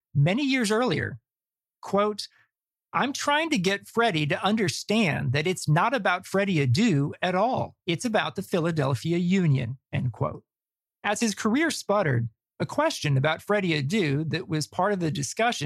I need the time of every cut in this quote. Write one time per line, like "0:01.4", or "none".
0:07.8
0:09.9